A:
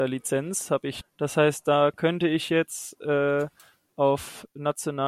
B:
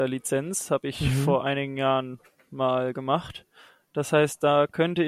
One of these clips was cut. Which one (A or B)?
A